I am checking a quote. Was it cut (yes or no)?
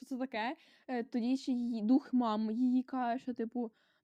no